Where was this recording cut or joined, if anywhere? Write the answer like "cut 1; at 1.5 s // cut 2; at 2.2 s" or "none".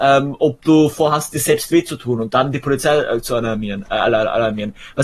none

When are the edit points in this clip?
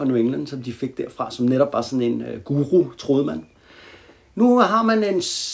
none

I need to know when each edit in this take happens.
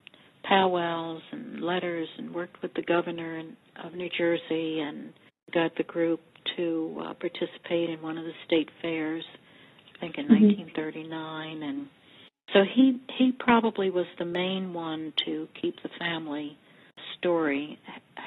none

